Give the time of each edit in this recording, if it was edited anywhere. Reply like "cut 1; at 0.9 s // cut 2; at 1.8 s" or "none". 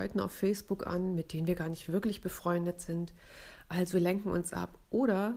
none